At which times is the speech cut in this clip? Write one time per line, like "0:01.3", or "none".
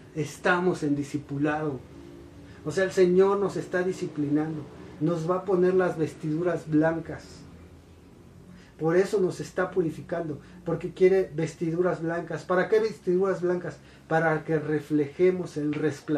0:05.0